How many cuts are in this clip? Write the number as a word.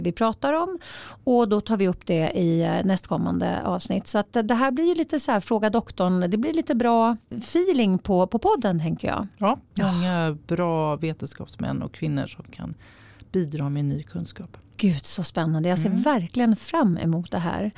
one